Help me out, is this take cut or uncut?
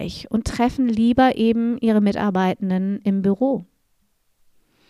uncut